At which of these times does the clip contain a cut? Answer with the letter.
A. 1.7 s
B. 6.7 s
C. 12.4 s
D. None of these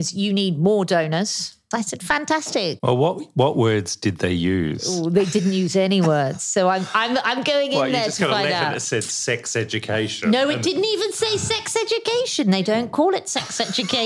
A